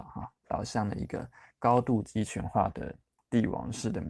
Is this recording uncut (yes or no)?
yes